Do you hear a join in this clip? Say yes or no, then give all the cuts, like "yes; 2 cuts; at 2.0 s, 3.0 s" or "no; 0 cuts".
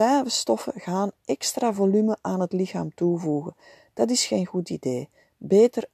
no; 0 cuts